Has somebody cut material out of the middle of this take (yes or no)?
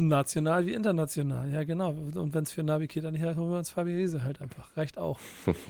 no